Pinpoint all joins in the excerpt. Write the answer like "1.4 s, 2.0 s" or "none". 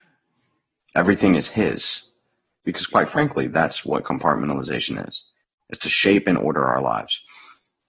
2.6 s